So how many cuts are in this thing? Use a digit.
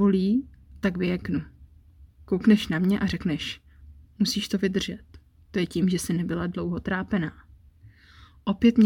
0